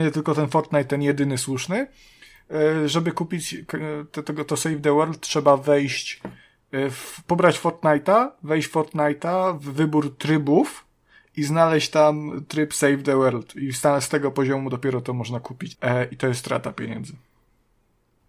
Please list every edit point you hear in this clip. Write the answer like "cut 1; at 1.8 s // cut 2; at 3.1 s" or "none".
cut 1; at 15.7 s